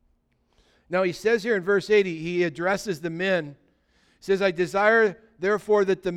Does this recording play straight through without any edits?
yes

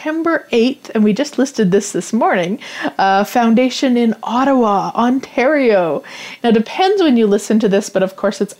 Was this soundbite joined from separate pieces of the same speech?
yes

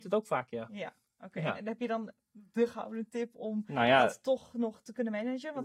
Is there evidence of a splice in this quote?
no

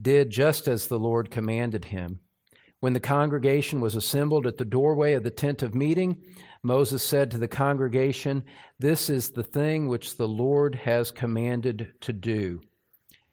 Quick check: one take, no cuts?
yes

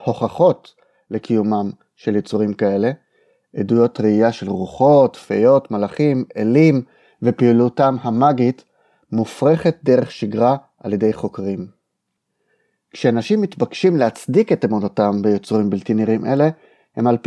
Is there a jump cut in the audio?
no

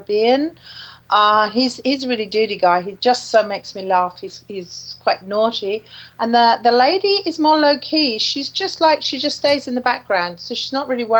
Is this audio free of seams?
yes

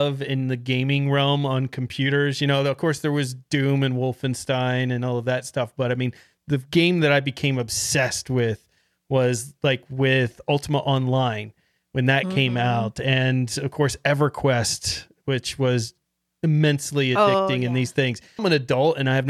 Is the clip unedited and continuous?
no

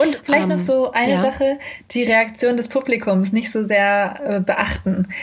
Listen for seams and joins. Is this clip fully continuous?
yes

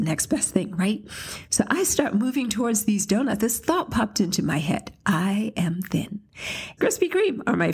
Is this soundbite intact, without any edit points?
no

